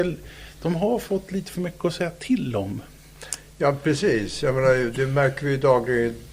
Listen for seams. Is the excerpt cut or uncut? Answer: uncut